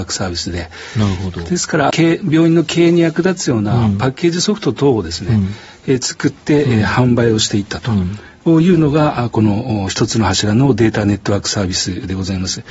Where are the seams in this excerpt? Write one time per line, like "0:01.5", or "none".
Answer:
0:01.9

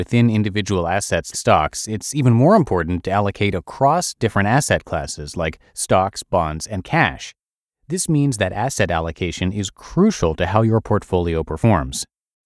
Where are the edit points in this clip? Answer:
0:01.3
0:07.7

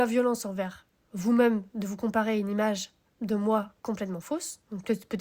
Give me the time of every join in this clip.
none

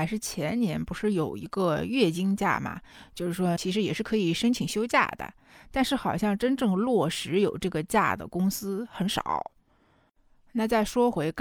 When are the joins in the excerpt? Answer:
0:03.6

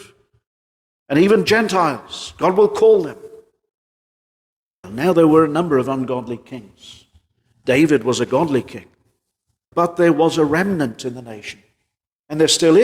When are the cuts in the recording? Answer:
0:04.8
0:09.7

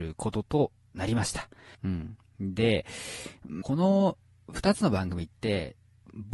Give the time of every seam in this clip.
0:01.7
0:03.6

